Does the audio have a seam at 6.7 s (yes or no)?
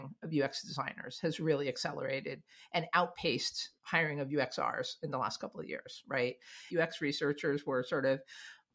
yes